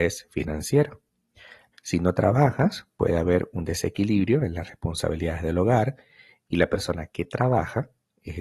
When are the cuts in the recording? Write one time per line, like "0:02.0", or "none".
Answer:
0:01.7